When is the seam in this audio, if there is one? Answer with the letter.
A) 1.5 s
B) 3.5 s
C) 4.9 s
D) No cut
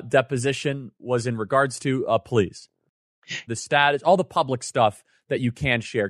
B